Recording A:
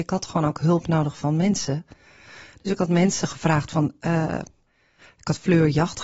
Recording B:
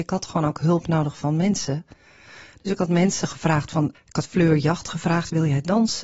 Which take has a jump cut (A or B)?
B